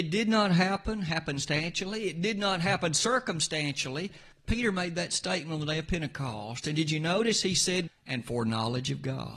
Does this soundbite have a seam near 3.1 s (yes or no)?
no